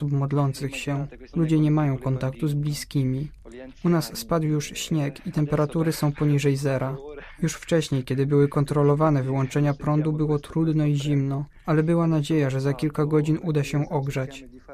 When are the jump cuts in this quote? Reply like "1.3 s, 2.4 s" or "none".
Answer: 1.3 s